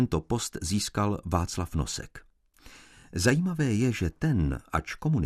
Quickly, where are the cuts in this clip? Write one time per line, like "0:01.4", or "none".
none